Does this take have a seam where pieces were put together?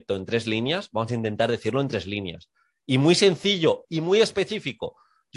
yes; 1 cut; at 3.9 s

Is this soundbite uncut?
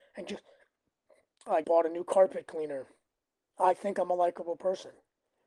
no; 2 cuts; at 1.6 s, 3.5 s

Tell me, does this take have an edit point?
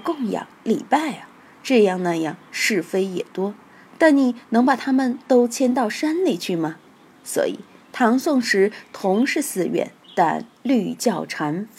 no; 0 cuts

